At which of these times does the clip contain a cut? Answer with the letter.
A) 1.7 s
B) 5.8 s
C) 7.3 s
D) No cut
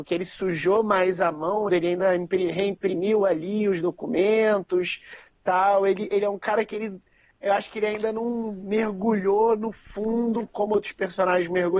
A